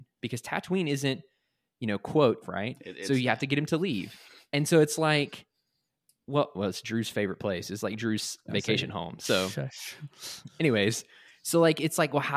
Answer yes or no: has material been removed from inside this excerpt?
yes